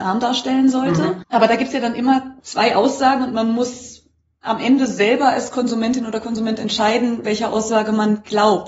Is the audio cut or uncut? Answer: cut